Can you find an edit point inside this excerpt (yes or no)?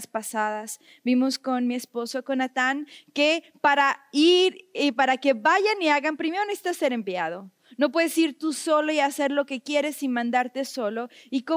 no